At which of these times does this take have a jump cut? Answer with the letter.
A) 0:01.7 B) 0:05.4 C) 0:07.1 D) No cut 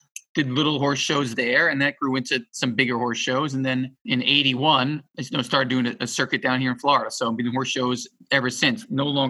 D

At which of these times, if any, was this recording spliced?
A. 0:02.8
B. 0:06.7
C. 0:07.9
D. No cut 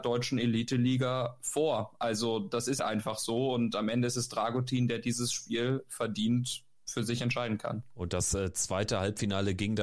A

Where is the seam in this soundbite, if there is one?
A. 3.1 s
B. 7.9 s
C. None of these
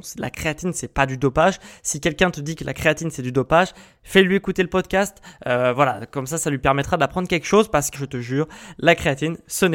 B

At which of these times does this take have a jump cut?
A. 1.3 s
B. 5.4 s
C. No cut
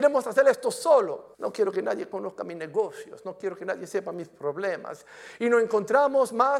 A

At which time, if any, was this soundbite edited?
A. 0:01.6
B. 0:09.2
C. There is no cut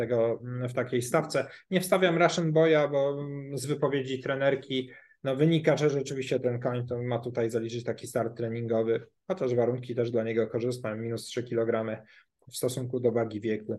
C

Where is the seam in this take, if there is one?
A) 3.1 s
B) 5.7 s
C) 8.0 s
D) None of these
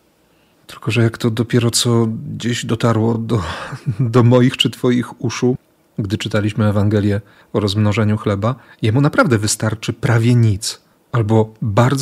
D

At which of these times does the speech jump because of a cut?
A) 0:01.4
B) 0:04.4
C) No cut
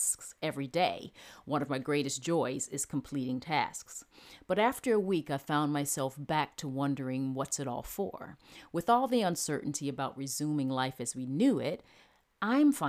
C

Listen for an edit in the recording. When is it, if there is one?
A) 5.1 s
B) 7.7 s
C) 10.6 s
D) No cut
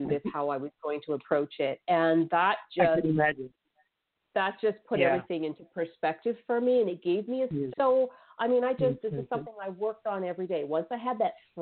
B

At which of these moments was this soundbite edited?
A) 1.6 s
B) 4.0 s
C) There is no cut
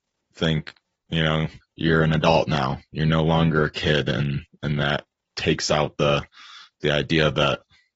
A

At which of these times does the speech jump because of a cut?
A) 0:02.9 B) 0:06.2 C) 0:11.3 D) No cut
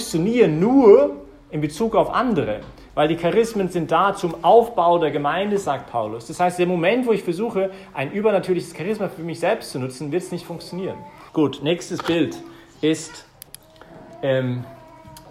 C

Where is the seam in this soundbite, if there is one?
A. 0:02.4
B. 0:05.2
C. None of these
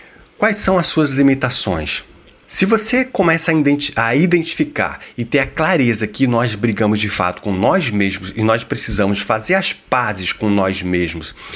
A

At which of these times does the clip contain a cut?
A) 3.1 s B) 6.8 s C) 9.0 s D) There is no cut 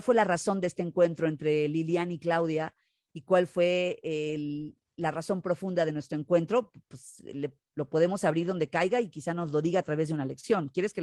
D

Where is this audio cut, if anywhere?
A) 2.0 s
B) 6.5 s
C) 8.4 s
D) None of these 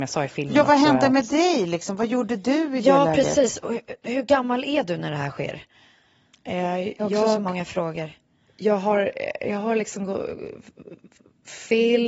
D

